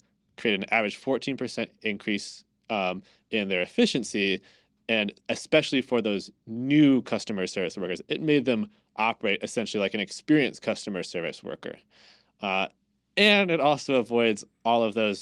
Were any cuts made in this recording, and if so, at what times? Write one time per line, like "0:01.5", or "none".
none